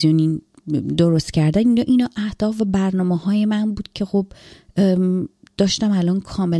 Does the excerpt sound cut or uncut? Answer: uncut